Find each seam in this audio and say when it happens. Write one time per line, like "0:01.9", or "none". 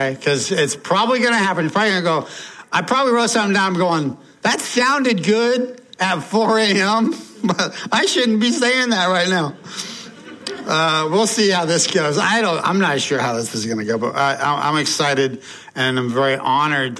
none